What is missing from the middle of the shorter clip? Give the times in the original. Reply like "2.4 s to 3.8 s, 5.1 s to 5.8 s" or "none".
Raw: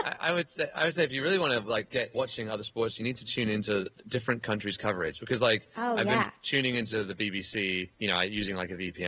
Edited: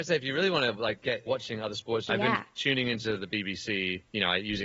3.0 s to 6.0 s